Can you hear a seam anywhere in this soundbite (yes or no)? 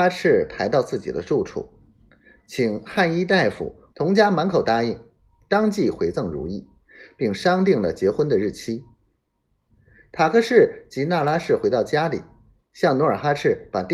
yes